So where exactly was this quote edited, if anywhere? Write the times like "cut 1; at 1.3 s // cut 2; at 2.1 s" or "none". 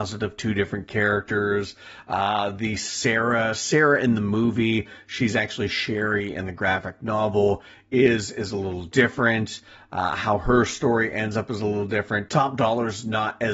none